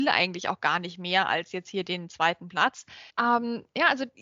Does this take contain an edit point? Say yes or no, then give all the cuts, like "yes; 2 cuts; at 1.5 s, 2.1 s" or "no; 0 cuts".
yes; 1 cut; at 3.1 s